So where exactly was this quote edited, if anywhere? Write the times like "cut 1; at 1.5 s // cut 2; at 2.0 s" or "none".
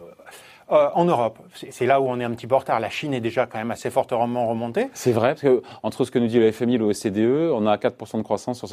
none